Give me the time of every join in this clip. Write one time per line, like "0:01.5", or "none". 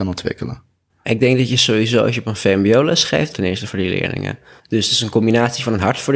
0:03.3
0:04.6